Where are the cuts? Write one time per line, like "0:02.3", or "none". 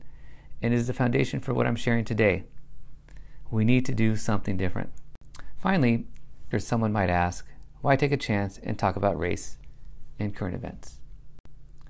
0:06.5